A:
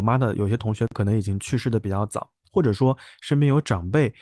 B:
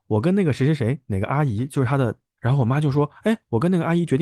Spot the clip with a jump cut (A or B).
B